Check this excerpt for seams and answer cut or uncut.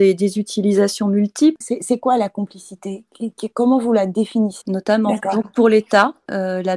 cut